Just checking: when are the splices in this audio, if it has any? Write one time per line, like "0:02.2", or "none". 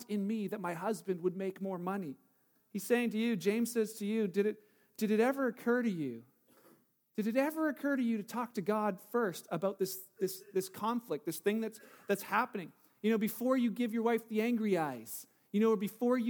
0:02.6